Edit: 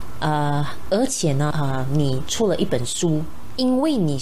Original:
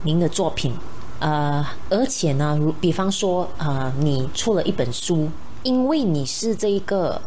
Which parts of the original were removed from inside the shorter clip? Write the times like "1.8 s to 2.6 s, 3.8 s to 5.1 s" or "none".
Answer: 2.5 s to 3.6 s